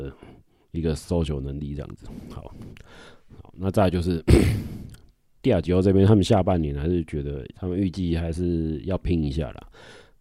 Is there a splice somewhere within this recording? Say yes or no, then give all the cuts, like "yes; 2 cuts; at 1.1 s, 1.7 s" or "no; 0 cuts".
yes; 1 cut; at 7.5 s